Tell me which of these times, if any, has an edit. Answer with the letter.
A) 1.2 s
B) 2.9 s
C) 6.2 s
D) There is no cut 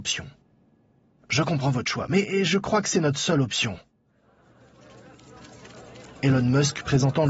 C